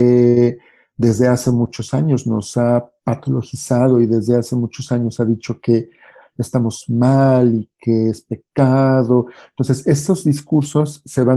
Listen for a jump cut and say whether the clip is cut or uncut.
uncut